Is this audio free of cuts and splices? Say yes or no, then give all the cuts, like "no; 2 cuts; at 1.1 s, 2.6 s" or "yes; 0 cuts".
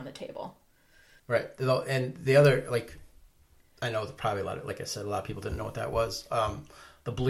no; 1 cut; at 1.2 s